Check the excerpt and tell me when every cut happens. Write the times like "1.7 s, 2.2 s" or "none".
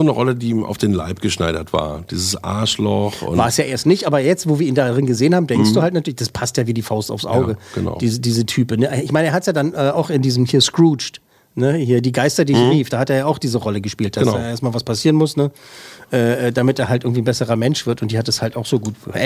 none